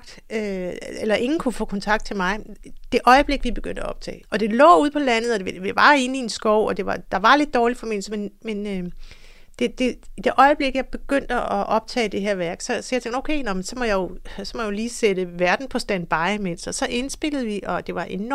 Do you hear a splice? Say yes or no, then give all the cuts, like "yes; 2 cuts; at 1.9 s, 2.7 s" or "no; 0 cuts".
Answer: yes; 1 cut; at 4.2 s